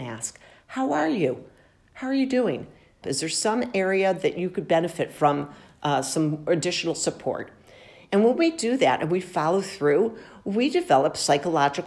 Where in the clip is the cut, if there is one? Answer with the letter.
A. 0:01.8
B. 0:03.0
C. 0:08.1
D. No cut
B